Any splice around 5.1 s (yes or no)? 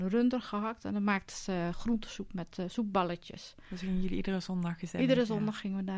no